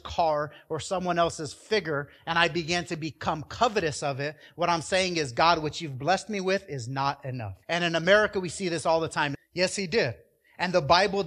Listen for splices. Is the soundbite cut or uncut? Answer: cut